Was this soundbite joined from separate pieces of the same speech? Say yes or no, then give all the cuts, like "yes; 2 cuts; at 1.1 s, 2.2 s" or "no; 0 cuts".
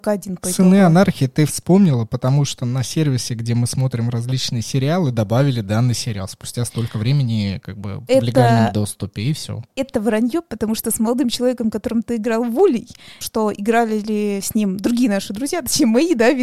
yes; 2 cuts; at 8.1 s, 13.2 s